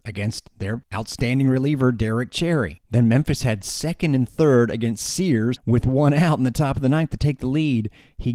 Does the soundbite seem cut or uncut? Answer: cut